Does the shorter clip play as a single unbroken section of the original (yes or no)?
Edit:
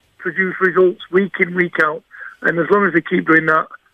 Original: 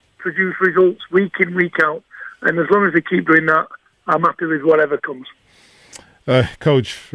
yes